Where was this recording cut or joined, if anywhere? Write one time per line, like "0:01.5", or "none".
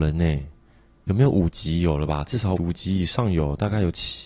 0:01.0
0:02.6